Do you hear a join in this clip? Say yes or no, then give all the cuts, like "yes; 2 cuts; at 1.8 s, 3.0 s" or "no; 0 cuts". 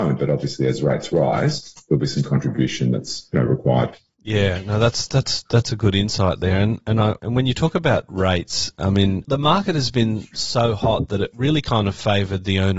no; 0 cuts